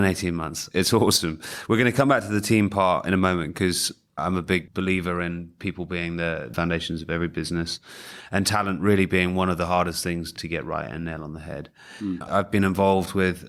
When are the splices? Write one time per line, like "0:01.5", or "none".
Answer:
0:12.2

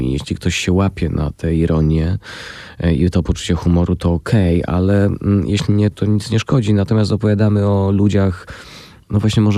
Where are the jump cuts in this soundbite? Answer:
0:05.9

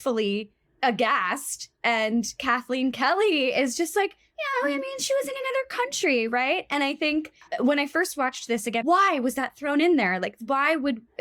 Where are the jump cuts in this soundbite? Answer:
0:08.8

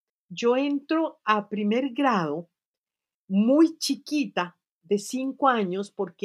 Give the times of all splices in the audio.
none

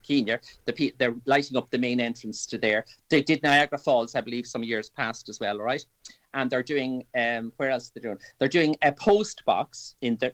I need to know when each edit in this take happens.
none

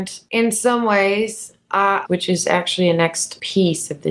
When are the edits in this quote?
0:02.0

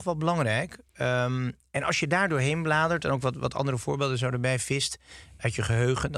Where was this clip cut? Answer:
none

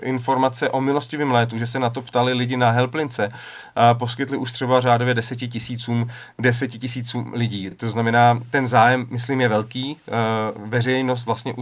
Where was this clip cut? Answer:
none

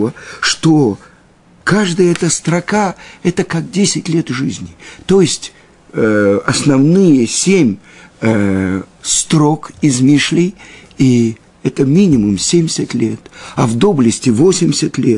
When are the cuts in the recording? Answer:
none

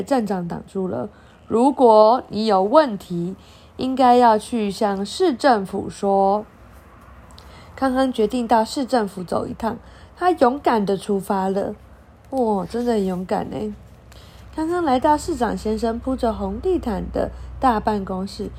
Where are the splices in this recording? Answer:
none

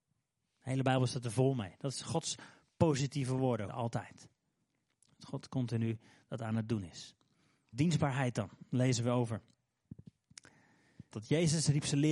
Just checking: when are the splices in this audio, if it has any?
0:03.7
0:07.7
0:11.1

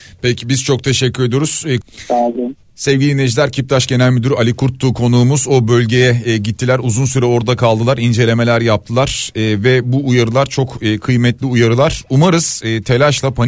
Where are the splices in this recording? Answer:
0:01.8

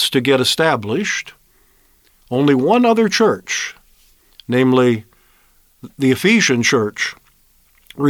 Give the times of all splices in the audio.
none

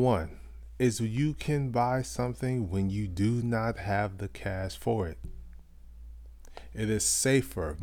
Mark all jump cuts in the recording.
none

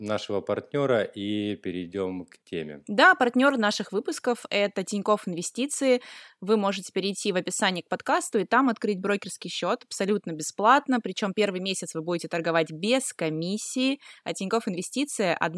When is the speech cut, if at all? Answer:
none

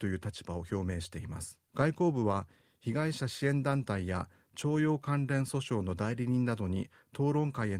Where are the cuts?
0:01.6

